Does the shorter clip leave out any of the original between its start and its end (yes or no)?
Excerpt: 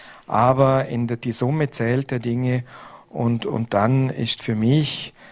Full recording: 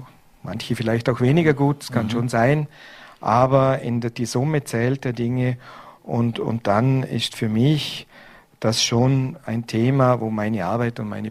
no